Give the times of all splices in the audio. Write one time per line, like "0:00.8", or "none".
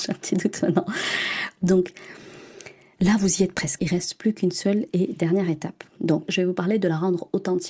0:03.8
0:06.3